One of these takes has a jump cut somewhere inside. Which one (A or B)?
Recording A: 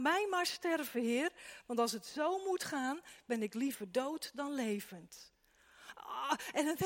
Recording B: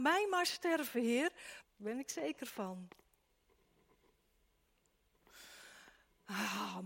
B